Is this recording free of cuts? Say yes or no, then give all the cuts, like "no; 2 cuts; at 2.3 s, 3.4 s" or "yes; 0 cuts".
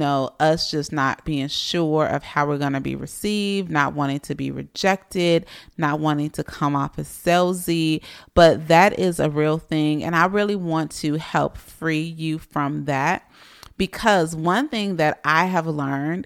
no; 1 cut; at 1.2 s